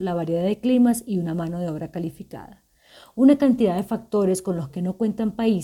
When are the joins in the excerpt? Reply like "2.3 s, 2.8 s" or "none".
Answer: none